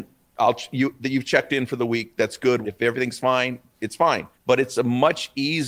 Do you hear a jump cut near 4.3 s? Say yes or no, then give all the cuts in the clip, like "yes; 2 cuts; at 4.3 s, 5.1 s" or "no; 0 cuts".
yes; 2 cuts; at 2.6 s, 4.3 s